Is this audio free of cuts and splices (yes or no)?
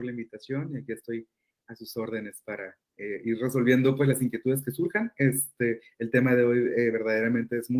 yes